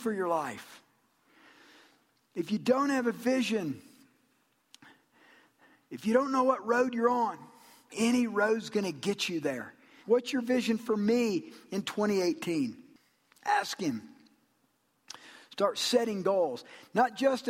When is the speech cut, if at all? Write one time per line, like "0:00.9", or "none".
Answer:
0:07.9
0:10.0